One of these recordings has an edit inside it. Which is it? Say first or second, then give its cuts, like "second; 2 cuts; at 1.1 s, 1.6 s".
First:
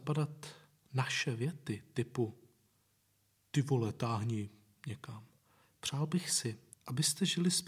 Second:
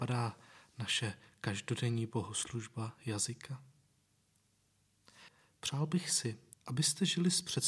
first; 1 cut; at 5.6 s